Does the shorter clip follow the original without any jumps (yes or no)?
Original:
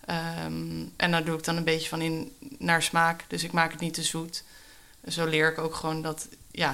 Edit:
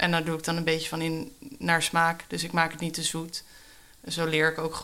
yes